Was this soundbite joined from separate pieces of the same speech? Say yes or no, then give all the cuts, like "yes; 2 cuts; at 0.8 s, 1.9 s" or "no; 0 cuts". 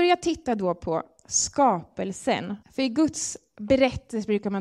yes; 1 cut; at 2.6 s